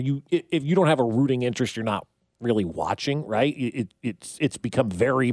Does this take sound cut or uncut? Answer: uncut